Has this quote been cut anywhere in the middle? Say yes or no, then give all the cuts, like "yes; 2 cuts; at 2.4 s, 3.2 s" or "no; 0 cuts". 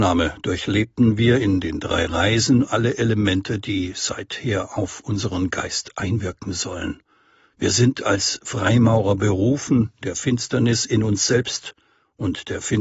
no; 0 cuts